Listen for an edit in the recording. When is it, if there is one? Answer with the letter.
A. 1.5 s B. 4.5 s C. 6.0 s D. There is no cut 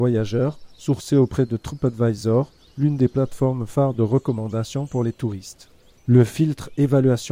C